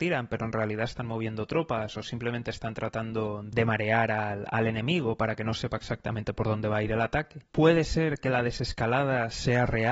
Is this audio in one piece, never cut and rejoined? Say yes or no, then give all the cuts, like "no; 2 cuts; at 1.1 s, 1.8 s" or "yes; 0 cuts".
yes; 0 cuts